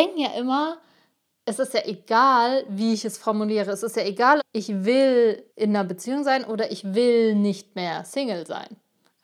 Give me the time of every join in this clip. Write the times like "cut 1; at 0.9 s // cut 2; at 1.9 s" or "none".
cut 1; at 4.4 s // cut 2; at 5.5 s

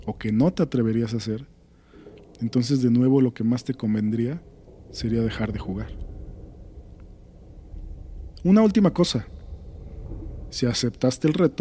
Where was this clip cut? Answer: cut 1; at 10.5 s

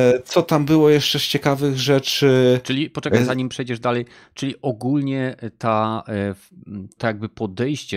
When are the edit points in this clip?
cut 1; at 7.0 s

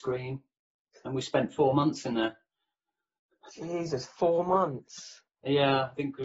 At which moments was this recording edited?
none

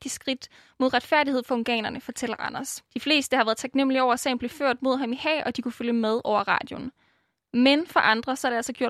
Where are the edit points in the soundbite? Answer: cut 1; at 2.9 s

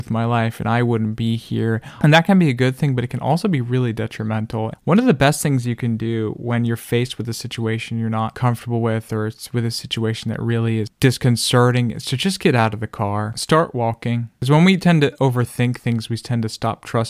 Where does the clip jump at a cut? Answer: cut 1; at 2.0 s

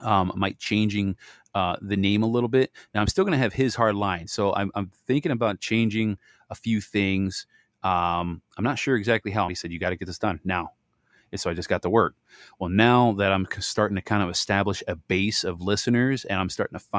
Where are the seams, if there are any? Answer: cut 1; at 9.5 s

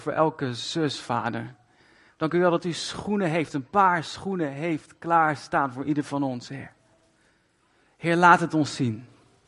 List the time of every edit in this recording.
none

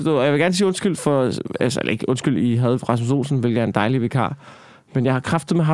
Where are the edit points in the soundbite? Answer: none

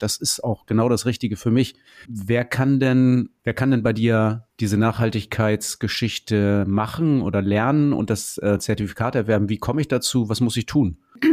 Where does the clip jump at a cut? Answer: cut 1; at 2.1 s // cut 2; at 4.5 s

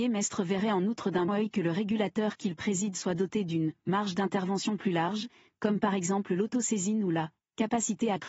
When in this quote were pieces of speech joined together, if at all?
cut 1; at 1.3 s

